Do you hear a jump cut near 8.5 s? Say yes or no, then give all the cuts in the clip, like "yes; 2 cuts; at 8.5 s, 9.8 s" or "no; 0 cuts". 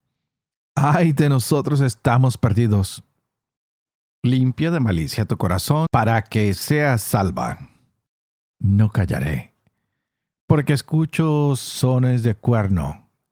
yes; 2 cuts; at 5.9 s, 8.5 s